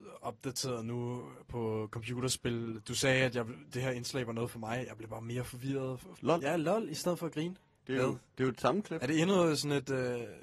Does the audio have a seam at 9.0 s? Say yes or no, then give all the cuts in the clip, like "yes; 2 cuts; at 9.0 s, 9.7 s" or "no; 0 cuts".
no; 2 cuts; at 6.1 s, 7.7 s